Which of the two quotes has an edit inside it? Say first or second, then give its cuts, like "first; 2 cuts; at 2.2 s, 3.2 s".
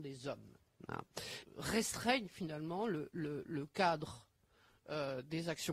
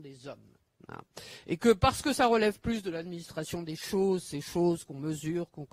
first; 1 cut; at 1.4 s